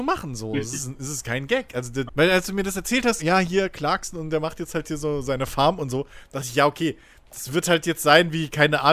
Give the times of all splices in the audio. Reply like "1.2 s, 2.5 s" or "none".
2.1 s, 3.2 s

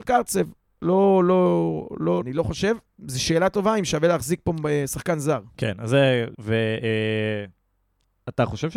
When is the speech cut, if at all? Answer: 2.2 s, 6.3 s

